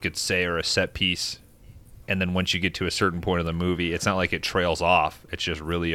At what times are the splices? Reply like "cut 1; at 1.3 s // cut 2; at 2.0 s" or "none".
cut 1; at 2.0 s